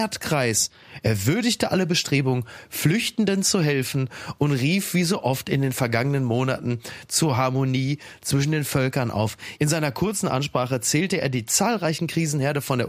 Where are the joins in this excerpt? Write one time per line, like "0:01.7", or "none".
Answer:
0:01.0
0:09.6

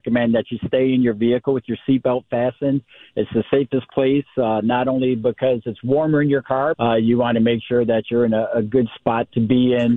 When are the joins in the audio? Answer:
0:06.7

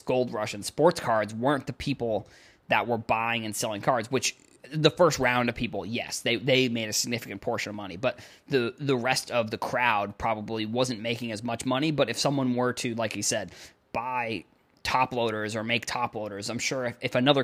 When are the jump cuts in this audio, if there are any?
none

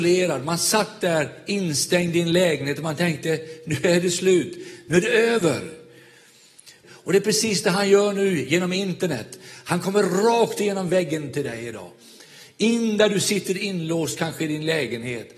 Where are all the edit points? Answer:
0:06.8

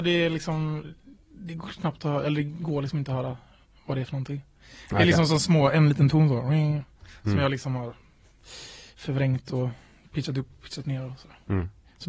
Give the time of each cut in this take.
0:01.2

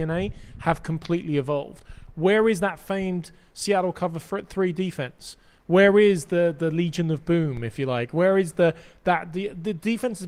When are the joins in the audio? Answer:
none

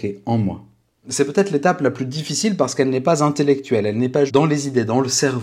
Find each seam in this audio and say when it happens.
0:01.0
0:04.3

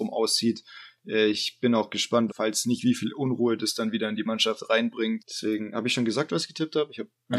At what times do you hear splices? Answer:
0:02.3
0:05.2

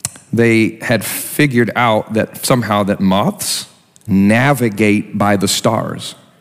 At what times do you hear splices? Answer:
0:04.1

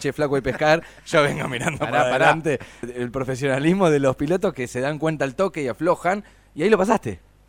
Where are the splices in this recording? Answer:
0:02.8

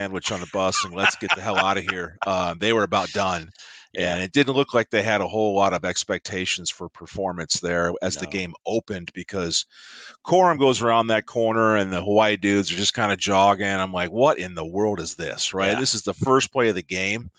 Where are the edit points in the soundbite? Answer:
none

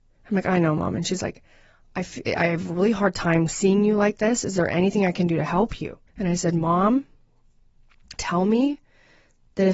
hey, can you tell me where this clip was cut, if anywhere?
0:06.1
0:08.2

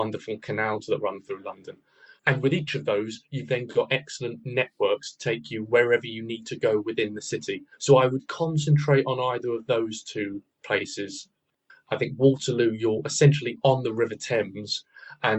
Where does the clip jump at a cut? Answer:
0:07.7
0:11.7

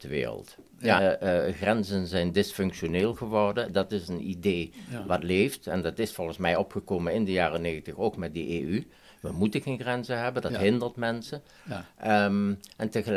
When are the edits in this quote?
0:01.0

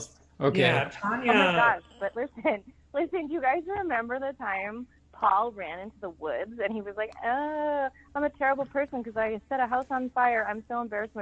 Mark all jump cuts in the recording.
none

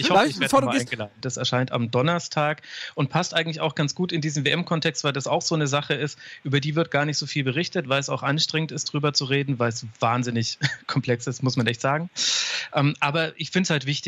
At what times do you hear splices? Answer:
0:01.2

